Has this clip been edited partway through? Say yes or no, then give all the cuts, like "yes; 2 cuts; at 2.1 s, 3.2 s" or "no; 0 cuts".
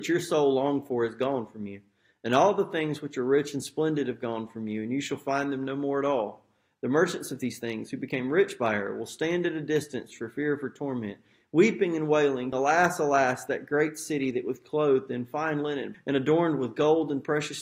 yes; 2 cuts; at 12.5 s, 15.9 s